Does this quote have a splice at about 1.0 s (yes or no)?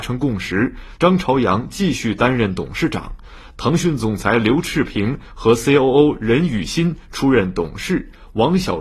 yes